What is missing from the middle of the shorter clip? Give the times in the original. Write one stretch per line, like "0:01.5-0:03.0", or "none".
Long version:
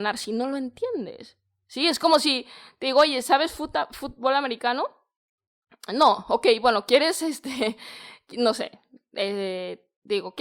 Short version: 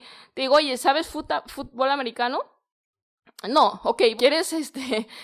0:06.6-0:06.9